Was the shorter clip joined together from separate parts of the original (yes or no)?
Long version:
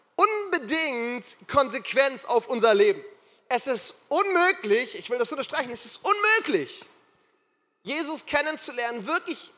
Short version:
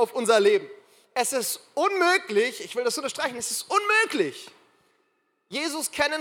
no